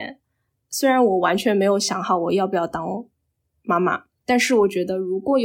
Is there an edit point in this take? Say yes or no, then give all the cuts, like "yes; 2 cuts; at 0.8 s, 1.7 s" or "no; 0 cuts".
no; 0 cuts